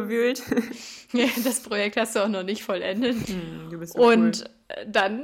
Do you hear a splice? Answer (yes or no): yes